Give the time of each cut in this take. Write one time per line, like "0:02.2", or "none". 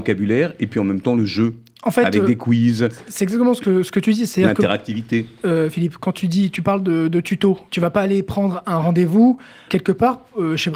0:07.7
0:09.7